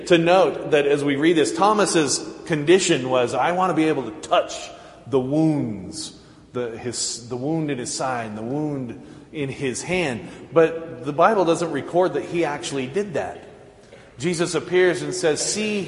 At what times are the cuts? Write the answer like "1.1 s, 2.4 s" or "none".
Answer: none